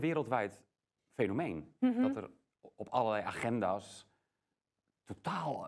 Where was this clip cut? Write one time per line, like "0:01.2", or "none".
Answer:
0:01.0